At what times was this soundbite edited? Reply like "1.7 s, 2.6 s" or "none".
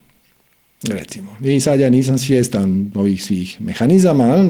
none